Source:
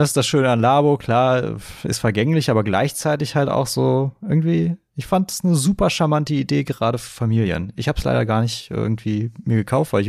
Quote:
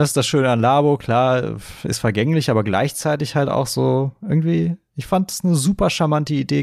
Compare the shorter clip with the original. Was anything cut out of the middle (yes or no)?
no